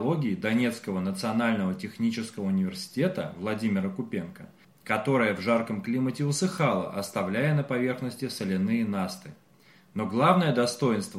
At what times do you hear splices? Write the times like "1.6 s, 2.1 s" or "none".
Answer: 4.6 s